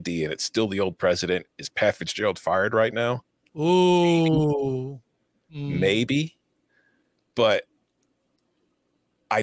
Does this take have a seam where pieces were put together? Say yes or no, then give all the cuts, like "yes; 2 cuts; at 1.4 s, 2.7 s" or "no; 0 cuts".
no; 0 cuts